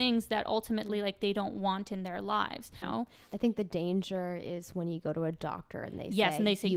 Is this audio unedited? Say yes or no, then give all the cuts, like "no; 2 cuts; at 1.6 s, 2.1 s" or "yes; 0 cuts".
no; 1 cut; at 2.8 s